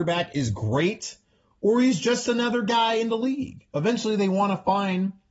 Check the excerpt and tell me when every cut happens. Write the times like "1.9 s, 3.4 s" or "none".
none